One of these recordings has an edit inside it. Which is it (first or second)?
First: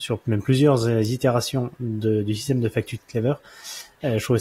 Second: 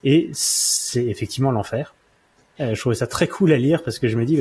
second